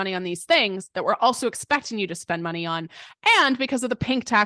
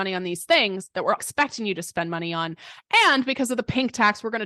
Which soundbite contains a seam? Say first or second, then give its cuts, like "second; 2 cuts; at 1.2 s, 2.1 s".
second; 1 cut; at 1.2 s